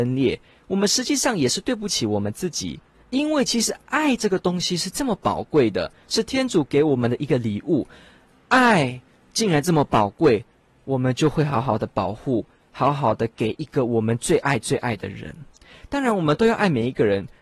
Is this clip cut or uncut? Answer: cut